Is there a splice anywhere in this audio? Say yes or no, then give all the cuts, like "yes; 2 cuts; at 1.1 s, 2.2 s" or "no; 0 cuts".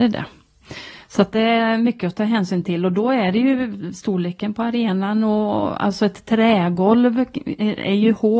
no; 0 cuts